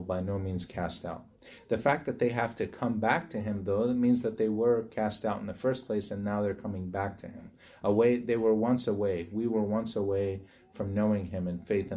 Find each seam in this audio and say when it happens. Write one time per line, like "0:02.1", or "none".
none